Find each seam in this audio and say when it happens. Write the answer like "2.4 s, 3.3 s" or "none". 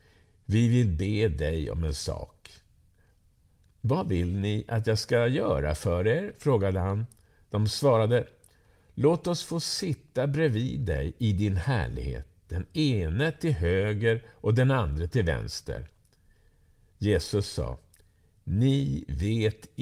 none